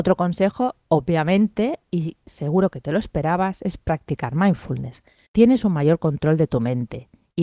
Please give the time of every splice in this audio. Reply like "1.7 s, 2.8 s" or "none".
5.3 s